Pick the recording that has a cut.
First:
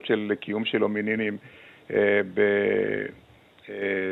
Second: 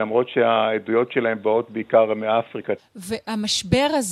second; 1 cut; at 2.8 s

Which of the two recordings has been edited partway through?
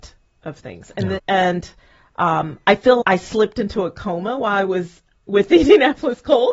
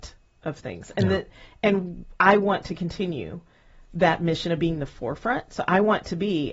first; 2 cuts; at 1.2 s, 3.0 s

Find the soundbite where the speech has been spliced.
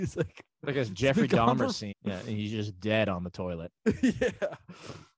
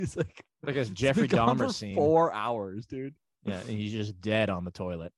first; 1 cut; at 1.9 s

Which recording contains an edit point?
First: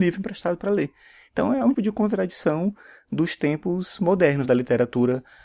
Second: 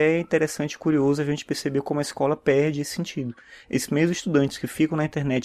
first; 2 cuts; at 1.7 s, 4.4 s

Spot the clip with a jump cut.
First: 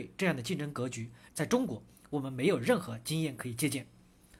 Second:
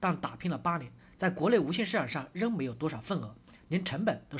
first; 1 cut; at 1.3 s

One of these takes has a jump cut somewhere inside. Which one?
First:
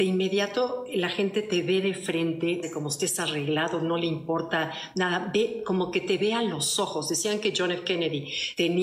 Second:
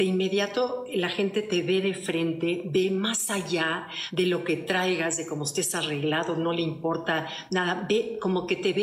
first; 1 cut; at 2.6 s

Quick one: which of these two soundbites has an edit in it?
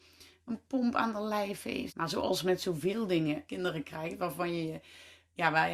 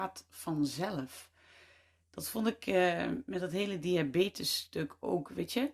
first; 2 cuts; at 1.9 s, 3.5 s

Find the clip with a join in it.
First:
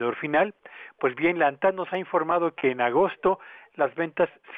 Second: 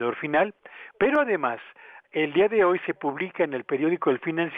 second; 1 cut; at 0.9 s

